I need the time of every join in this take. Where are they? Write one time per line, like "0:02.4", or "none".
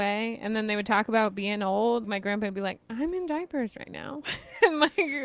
0:02.0